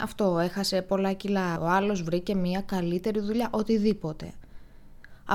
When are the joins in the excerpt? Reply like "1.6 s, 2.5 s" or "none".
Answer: 1.6 s